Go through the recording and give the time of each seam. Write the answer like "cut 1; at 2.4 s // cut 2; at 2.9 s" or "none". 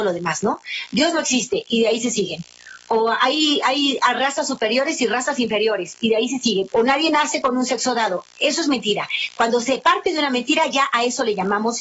cut 1; at 6.7 s